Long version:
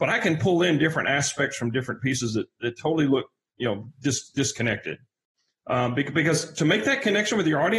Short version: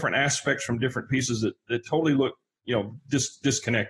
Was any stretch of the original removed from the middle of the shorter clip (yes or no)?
no